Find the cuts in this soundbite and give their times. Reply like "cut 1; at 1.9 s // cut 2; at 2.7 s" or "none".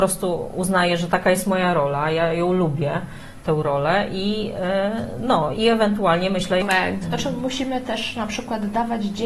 cut 1; at 5.5 s // cut 2; at 7.0 s